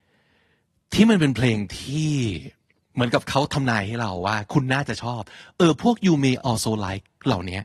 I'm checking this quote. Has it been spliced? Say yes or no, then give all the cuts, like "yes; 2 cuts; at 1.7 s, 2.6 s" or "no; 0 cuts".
no; 0 cuts